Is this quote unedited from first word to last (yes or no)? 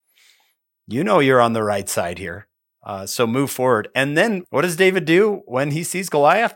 yes